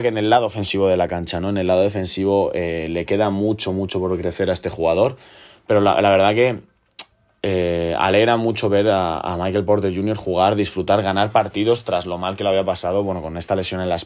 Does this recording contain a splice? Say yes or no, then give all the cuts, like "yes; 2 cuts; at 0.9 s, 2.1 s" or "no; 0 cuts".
no; 0 cuts